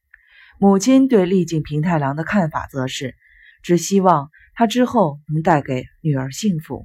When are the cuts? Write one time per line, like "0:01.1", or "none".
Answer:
0:03.5